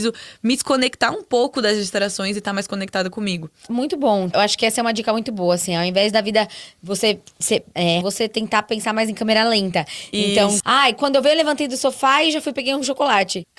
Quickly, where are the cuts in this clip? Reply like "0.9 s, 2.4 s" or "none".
8.0 s, 10.6 s